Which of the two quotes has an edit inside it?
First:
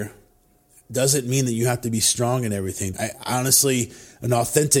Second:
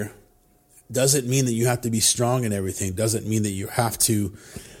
first; 1 cut; at 2.9 s

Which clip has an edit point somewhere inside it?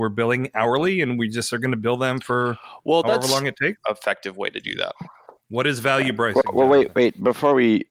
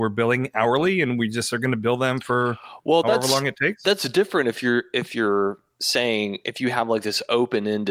first; 1 cut; at 3.8 s

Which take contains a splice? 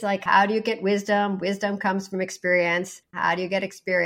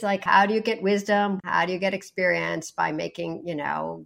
second; 1 cut; at 1.4 s

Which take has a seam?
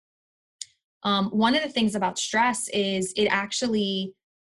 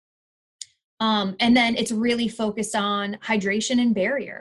first; 1 cut; at 0.9 s

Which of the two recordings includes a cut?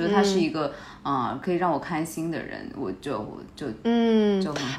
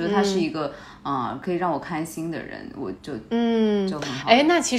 second; 1 cut; at 3.0 s

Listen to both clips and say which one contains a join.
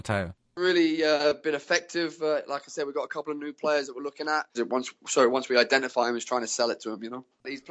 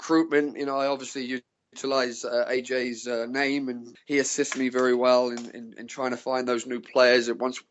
first; 1 cut; at 4.5 s

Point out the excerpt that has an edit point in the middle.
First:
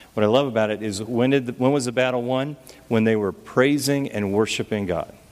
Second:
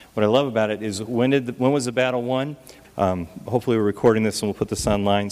second; 1 cut; at 2.8 s

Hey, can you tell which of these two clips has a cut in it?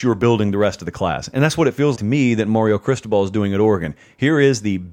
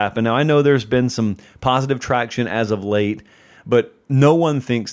first; 1 cut; at 2.0 s

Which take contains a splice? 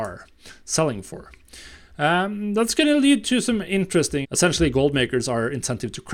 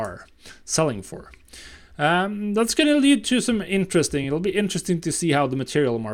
first; 1 cut; at 4.2 s

